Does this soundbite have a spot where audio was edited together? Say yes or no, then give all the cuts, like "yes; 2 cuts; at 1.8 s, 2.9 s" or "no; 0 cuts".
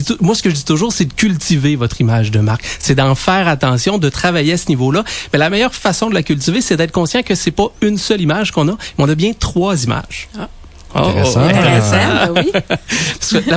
no; 0 cuts